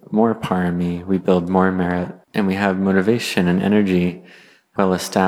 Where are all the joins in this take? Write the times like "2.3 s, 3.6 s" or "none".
2.2 s